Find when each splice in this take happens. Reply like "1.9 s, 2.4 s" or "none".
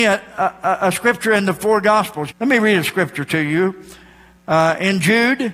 2.3 s

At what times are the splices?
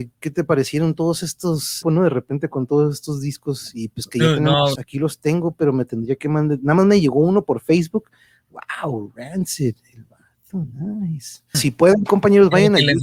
1.8 s, 4.8 s, 11.5 s

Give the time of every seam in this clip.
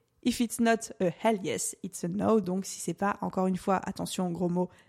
none

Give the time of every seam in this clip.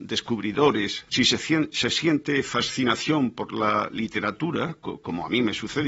1.1 s

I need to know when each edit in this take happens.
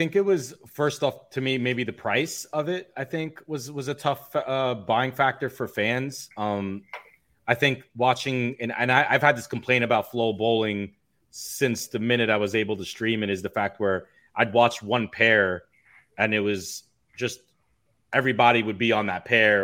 none

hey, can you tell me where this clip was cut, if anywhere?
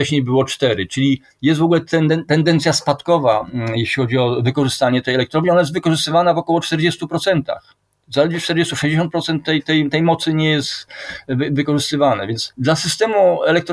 none

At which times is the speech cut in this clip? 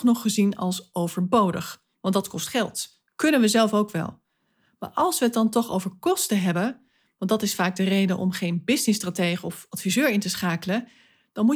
none

